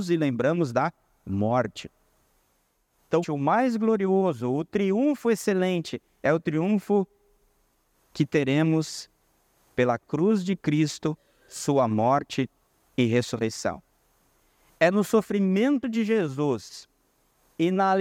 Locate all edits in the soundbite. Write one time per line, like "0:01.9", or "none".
0:03.2